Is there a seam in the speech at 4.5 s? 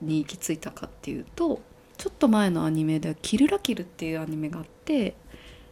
no; 1 cut; at 1.9 s

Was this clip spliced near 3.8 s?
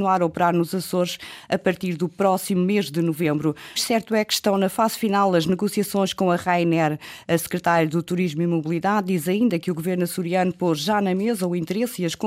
yes; 1 cut; at 3.8 s

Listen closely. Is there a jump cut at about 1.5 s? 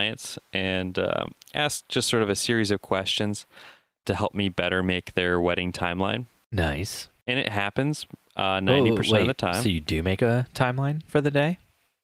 no; 2 cuts; at 4.0 s, 11.1 s

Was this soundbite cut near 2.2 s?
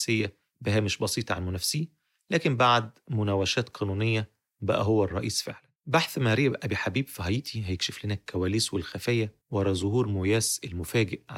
no; 2 cuts; at 5.8 s, 9.4 s

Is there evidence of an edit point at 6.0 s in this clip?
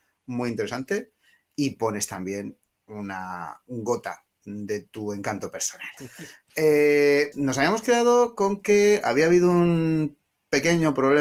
yes; 2 cuts; at 6.0 s, 7.3 s

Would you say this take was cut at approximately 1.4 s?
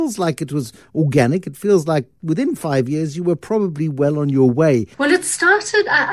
no; 1 cut; at 4.9 s

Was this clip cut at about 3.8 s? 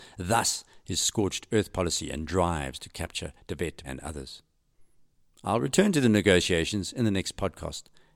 yes; 1 cut; at 3.8 s

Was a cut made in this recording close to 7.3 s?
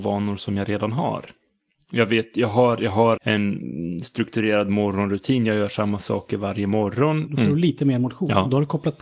yes; 2 cuts; at 3.2 s, 7.3 s

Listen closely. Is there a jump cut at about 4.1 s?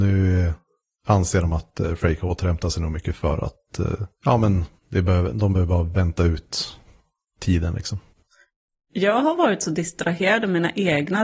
yes; 1 cut; at 4.1 s

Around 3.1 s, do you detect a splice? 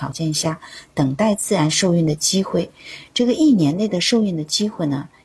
no; 0 cuts

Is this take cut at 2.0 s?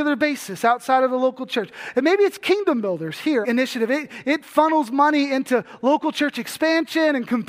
no; 1 cut; at 3.4 s

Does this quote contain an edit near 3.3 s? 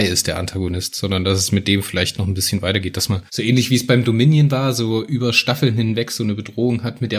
yes; 1 cut; at 3.3 s

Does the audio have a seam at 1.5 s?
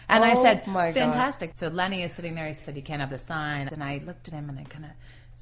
yes; 2 cuts; at 1.5 s, 3.7 s

